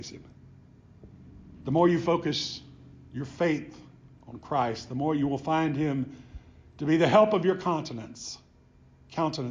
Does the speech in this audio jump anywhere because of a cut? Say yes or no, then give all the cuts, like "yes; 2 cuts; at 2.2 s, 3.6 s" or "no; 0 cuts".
no; 0 cuts